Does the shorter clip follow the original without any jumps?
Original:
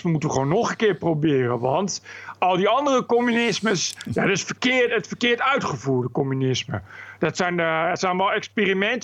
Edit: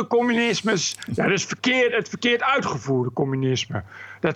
yes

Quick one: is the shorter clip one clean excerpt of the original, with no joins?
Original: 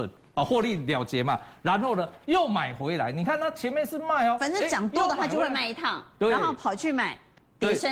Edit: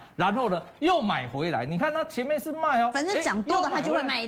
yes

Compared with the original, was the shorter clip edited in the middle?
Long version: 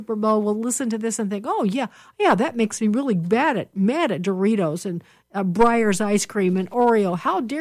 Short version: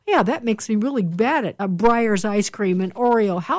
yes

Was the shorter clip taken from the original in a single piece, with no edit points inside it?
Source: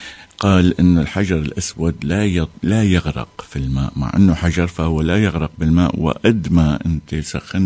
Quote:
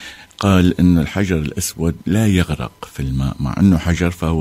no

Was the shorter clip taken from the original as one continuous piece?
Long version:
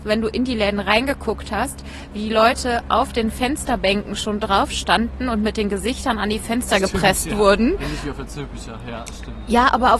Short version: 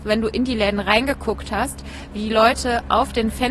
yes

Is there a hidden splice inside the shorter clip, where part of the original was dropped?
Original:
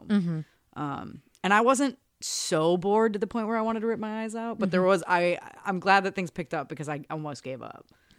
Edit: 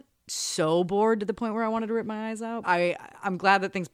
yes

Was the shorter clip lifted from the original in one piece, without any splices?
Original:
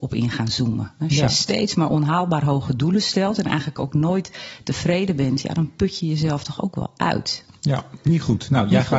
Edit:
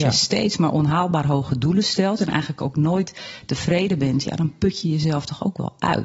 yes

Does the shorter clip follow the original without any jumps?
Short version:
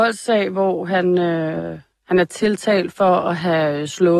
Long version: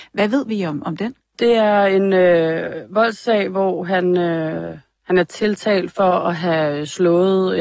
yes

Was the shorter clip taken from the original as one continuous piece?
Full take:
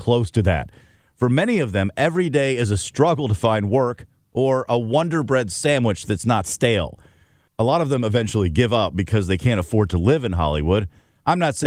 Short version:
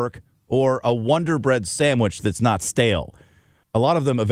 yes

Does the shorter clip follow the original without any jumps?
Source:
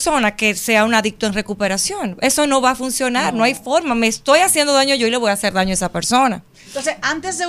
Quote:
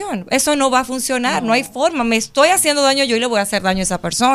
yes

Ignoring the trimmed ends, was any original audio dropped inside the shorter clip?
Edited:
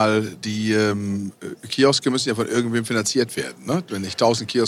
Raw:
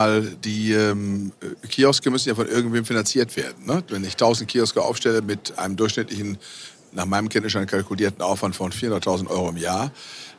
no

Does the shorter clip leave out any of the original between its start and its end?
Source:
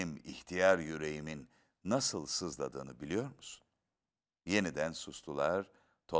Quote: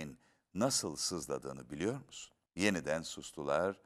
yes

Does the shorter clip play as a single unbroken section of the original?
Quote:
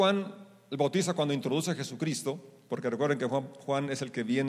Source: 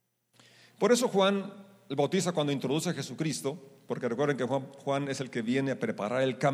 yes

